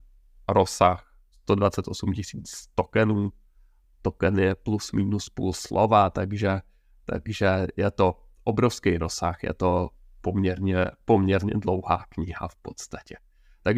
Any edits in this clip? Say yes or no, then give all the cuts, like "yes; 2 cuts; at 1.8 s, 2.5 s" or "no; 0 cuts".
no; 0 cuts